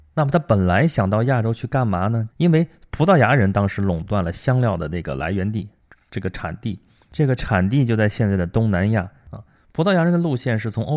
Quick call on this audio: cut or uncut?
cut